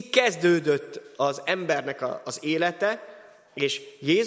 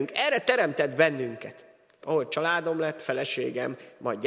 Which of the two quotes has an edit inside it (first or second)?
second